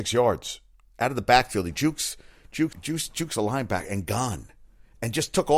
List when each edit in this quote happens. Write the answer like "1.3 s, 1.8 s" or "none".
2.7 s